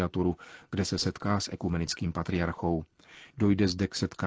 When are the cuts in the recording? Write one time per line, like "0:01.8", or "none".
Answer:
0:03.3